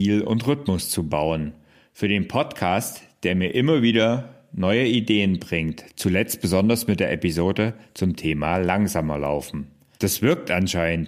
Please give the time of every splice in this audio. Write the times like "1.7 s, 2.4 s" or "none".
10.0 s

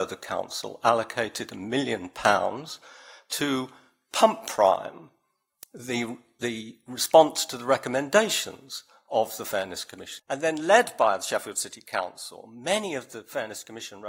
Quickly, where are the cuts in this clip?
10.2 s

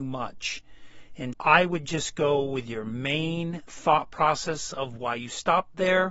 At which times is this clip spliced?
1.3 s

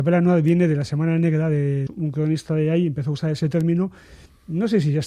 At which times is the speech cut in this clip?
1.9 s

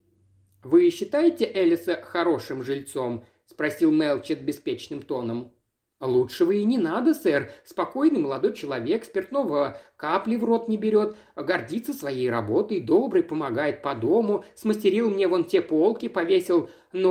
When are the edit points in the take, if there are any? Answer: none

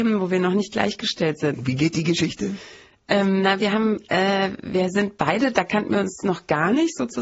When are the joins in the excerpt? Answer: 1.5 s

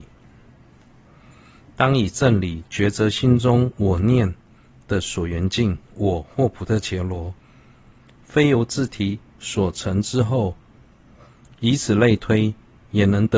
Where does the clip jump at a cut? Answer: none

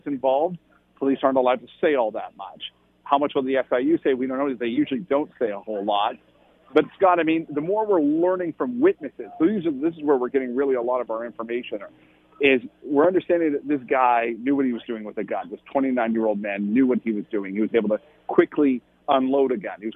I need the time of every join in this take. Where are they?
none

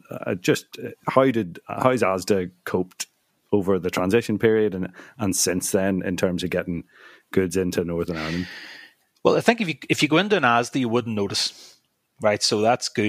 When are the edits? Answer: none

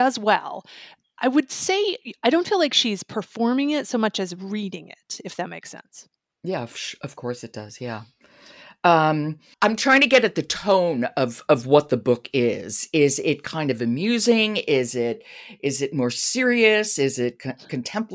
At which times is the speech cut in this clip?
none

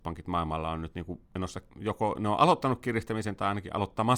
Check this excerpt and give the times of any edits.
1.7 s

